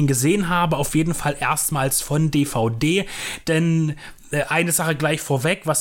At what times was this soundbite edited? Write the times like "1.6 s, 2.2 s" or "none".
none